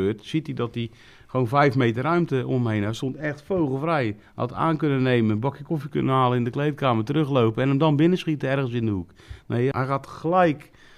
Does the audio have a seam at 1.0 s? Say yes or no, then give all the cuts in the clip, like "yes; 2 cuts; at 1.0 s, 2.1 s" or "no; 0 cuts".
no; 1 cut; at 9.7 s